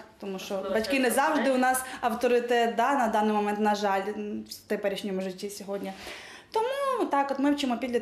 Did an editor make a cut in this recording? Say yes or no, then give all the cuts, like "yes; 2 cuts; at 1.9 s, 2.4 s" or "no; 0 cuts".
no; 0 cuts